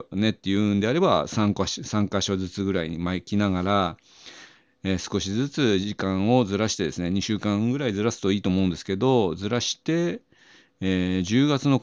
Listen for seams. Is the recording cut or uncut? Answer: uncut